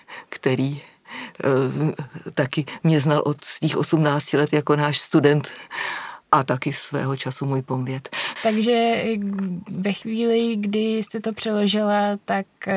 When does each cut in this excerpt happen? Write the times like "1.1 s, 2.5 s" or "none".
6.2 s, 8.4 s